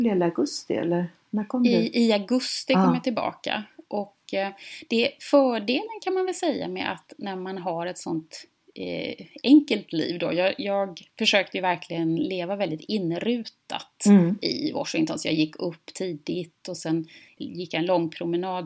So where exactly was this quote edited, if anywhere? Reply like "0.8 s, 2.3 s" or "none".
none